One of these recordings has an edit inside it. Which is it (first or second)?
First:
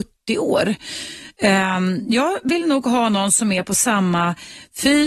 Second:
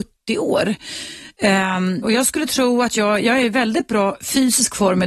second